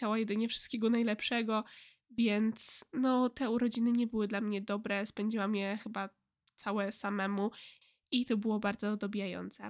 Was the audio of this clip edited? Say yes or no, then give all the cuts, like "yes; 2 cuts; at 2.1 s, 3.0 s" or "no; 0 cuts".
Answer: no; 0 cuts